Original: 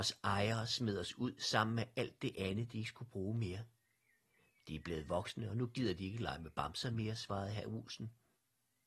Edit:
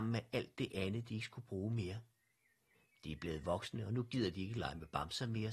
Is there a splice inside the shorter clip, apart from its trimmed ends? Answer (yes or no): no